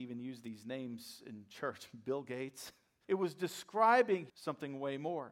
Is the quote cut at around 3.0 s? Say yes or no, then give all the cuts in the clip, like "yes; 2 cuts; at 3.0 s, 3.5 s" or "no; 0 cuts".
yes; 2 cuts; at 3.0 s, 4.3 s